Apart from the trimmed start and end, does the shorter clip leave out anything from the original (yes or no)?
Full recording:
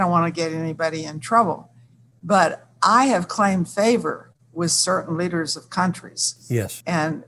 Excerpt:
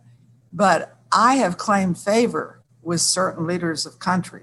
no